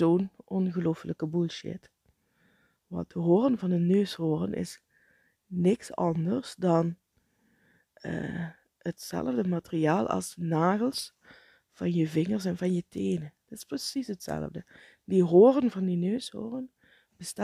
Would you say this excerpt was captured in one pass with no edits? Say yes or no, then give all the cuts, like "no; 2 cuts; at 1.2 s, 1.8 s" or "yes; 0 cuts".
yes; 0 cuts